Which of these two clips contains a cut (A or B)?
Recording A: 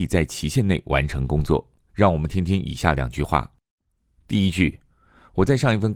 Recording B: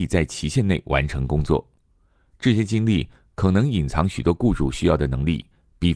A